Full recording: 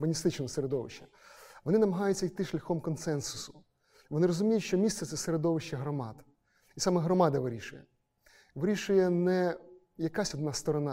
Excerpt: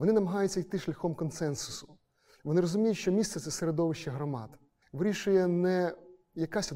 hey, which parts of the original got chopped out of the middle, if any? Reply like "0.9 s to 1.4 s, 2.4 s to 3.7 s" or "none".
6.5 s to 8.4 s